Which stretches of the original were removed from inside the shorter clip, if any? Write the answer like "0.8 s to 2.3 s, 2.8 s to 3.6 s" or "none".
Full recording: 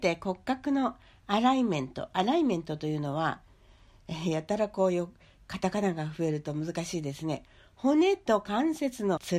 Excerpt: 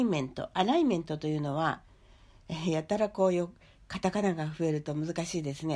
none